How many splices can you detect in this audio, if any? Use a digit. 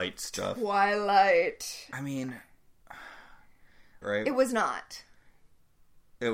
1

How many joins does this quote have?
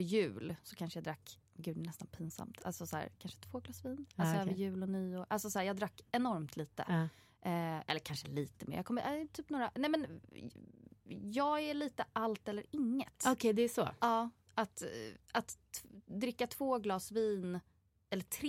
0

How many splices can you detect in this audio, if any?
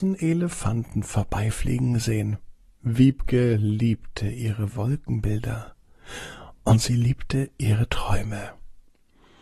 1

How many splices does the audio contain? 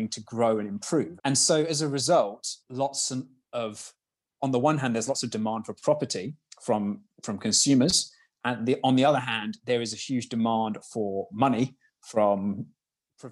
2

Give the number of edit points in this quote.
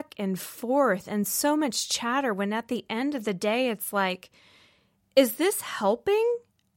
0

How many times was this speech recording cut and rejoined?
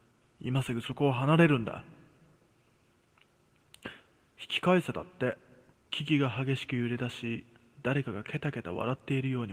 1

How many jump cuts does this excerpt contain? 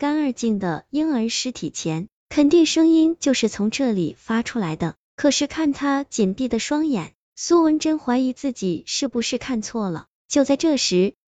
0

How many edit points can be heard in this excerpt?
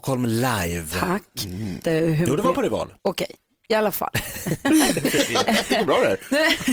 2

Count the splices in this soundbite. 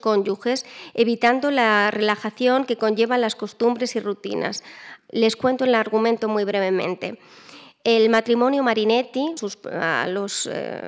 2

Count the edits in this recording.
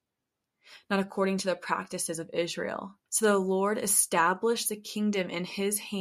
1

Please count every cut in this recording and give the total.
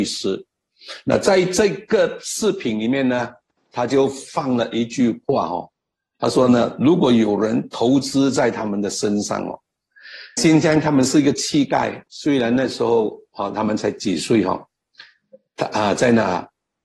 2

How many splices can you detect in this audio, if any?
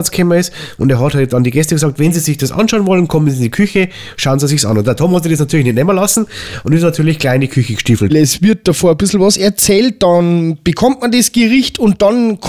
1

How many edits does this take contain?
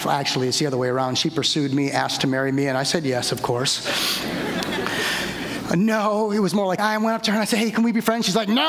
1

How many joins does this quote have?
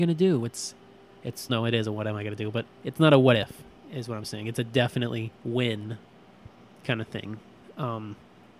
2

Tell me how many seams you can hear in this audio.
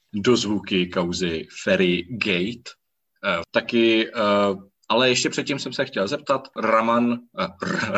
2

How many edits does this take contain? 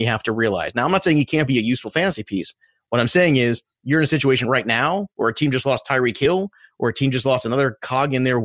0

